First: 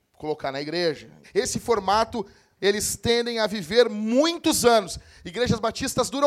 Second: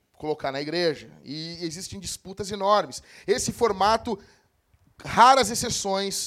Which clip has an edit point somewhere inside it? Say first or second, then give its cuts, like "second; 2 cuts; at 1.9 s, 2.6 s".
first; 2 cuts; at 1.2 s, 2.6 s